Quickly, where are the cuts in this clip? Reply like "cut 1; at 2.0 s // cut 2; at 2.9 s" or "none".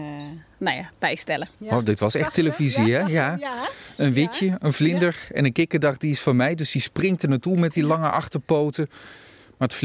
cut 1; at 1.6 s